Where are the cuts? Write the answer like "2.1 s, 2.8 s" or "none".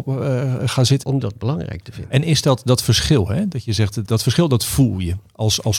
1.0 s, 4.1 s